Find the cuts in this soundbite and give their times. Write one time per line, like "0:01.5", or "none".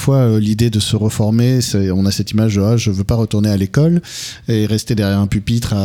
none